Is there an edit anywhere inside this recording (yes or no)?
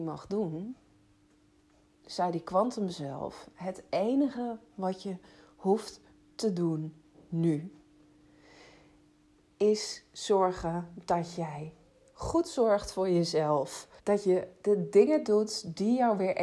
yes